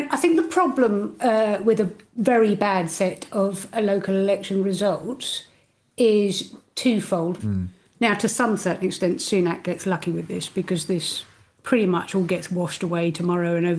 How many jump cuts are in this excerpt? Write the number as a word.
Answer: one